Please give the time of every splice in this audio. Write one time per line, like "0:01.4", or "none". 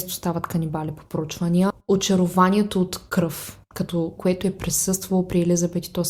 0:04.2